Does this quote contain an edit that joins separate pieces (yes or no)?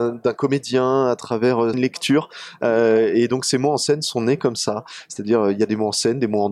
yes